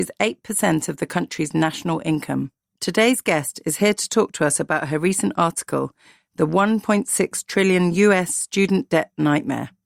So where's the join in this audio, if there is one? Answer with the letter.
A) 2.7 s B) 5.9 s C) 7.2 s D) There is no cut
A